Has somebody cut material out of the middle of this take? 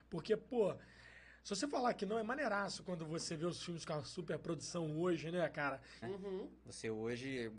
yes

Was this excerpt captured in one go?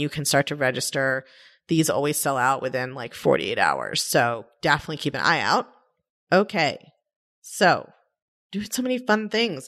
no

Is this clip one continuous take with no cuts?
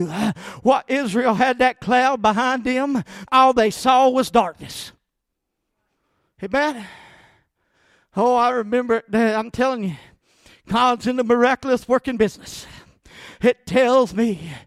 no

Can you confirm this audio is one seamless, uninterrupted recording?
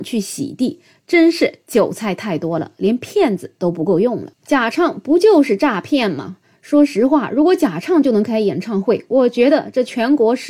no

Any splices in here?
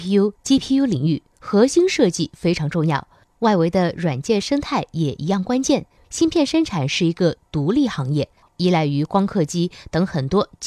yes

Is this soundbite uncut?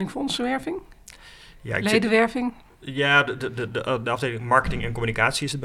yes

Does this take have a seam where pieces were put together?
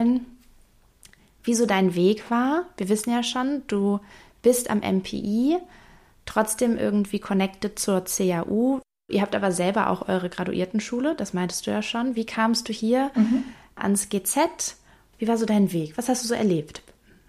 no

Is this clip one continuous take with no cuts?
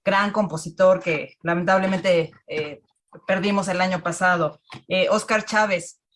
yes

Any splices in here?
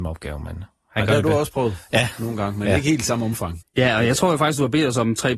yes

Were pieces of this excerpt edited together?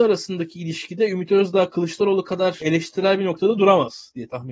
no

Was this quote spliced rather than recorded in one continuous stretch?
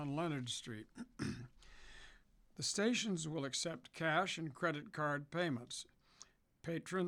no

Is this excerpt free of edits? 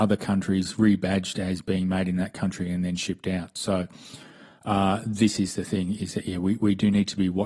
yes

